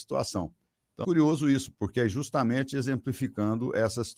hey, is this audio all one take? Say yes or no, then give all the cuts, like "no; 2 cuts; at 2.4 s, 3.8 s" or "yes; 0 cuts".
no; 1 cut; at 1.0 s